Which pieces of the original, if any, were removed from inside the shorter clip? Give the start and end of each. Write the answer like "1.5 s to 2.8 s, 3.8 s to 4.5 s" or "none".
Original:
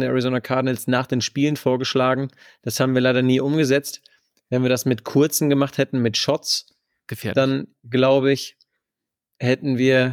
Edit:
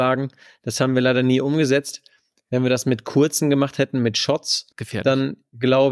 6.7 s to 7.0 s